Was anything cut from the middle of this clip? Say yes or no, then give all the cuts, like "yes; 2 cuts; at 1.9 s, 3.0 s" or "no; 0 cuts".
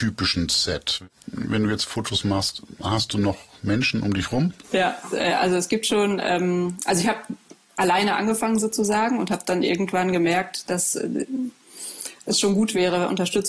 no; 0 cuts